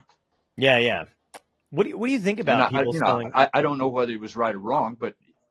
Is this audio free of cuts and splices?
yes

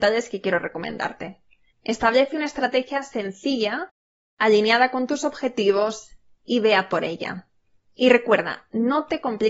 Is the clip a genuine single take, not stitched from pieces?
no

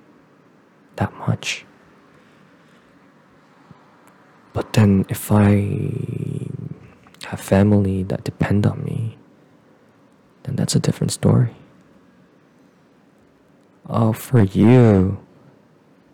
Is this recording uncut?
yes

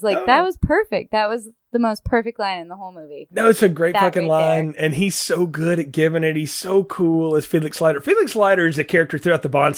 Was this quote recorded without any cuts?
yes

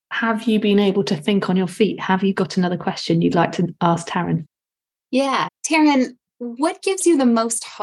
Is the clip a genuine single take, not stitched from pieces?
no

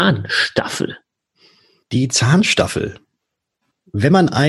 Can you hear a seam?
no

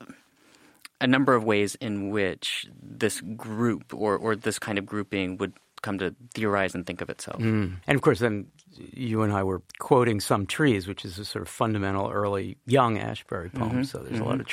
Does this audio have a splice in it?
yes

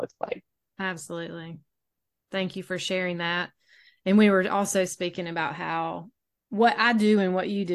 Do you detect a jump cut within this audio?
no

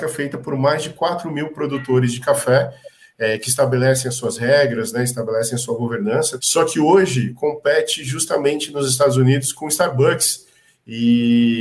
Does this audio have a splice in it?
yes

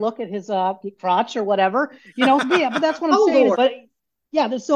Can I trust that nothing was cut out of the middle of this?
no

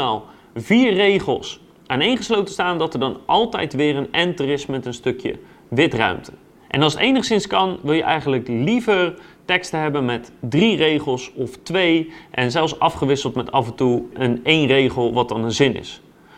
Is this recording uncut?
no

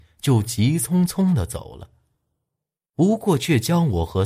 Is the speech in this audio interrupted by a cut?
no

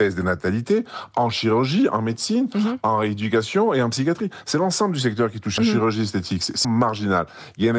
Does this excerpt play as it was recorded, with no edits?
no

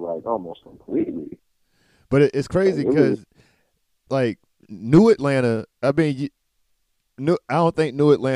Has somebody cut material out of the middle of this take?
no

